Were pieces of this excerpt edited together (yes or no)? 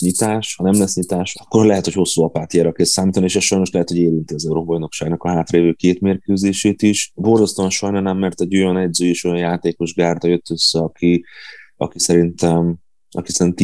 no